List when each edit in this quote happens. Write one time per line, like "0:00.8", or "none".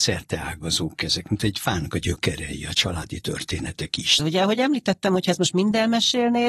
0:04.2